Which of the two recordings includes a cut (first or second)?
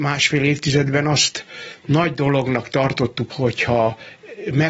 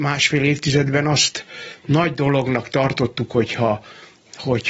first